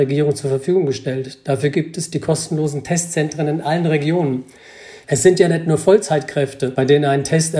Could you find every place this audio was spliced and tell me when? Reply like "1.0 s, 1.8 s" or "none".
5.0 s